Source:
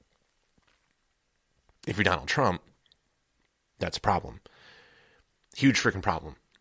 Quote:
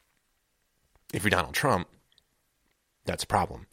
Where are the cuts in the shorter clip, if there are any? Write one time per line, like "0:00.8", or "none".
none